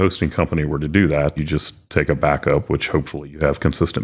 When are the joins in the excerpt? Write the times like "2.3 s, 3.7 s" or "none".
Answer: 1.4 s